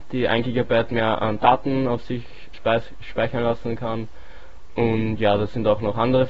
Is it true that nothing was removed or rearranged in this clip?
no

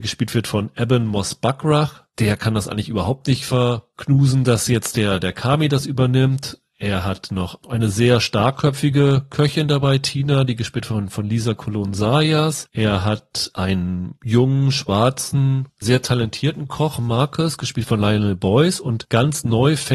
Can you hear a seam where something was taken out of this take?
no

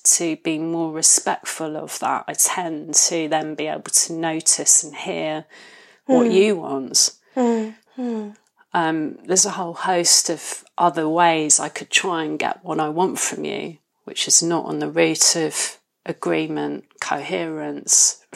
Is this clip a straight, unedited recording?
no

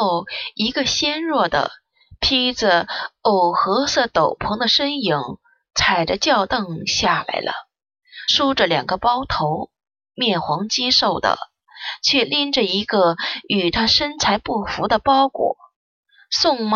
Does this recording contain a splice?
yes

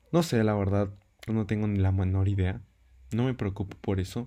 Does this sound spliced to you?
yes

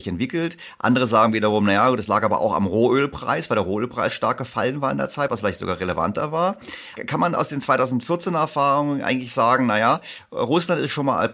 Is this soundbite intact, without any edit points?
no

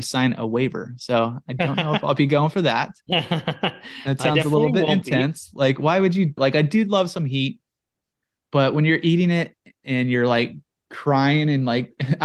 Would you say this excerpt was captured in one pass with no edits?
no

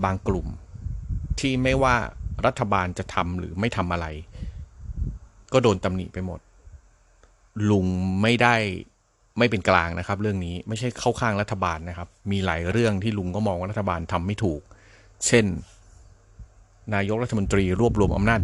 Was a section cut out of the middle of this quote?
no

